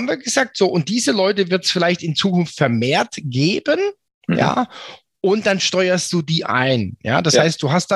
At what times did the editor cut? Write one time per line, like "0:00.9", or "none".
none